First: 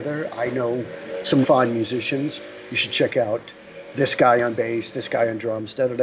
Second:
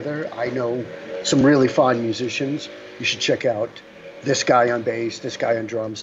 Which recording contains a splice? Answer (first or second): first